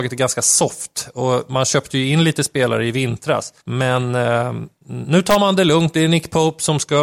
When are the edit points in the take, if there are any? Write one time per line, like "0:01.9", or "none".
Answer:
0:03.6

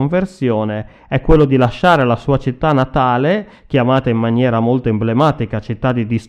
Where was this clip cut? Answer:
none

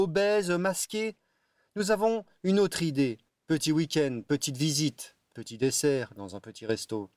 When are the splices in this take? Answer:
0:03.3
0:05.3

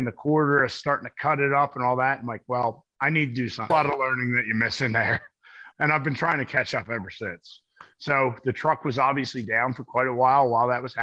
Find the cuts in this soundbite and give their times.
0:03.7
0:05.7

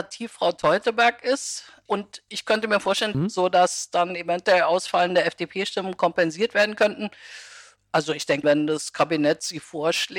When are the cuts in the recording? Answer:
0:03.1
0:08.4

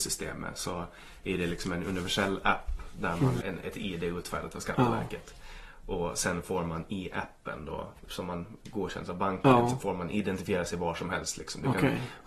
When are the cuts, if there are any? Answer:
0:03.4

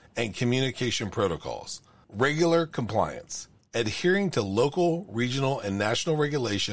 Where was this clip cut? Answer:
none

